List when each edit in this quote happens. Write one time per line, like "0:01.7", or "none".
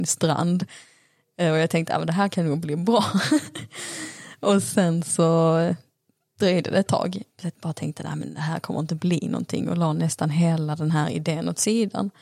none